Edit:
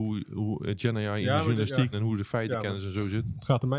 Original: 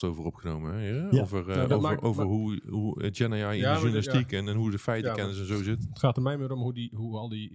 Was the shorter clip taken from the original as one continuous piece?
no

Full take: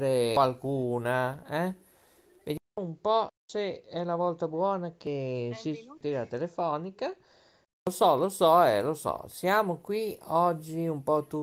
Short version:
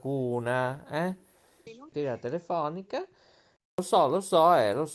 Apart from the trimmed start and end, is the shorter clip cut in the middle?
yes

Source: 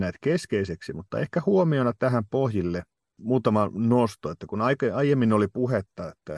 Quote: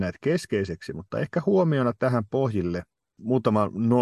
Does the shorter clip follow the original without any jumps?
yes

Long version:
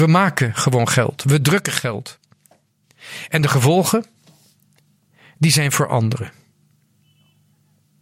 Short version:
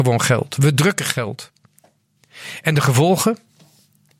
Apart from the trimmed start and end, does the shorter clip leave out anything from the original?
no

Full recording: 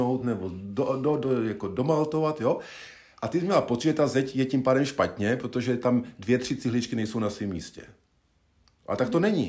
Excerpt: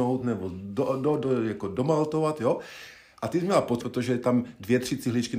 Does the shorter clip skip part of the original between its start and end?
yes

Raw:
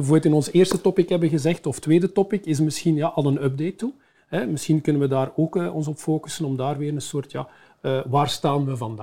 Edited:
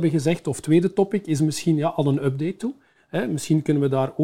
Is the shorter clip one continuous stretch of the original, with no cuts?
yes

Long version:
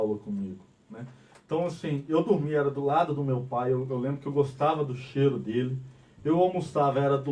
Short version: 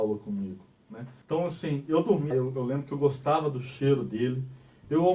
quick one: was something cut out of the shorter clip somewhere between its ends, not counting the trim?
yes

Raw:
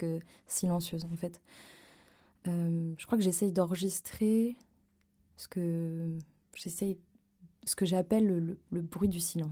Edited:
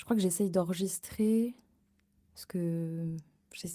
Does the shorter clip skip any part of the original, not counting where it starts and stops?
no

